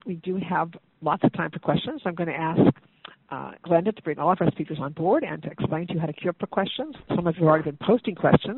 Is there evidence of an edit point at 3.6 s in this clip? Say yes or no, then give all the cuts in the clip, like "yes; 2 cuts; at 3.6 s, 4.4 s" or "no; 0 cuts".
yes; 1 cut; at 3.6 s